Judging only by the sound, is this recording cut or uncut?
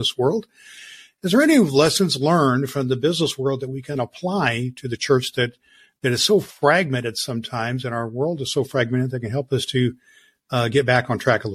uncut